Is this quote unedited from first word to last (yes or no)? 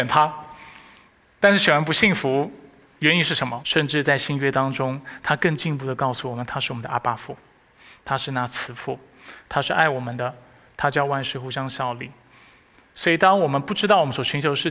no